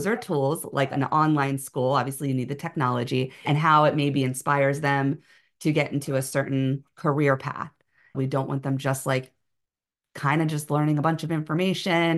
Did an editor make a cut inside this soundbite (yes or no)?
yes